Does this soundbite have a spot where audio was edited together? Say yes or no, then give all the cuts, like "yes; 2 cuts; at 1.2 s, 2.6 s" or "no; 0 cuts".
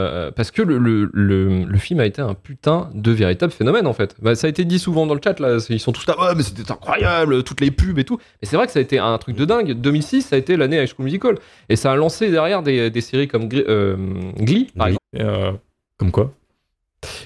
yes; 1 cut; at 15.0 s